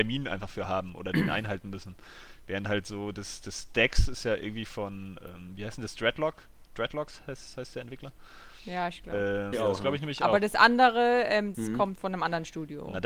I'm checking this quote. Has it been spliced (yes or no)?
yes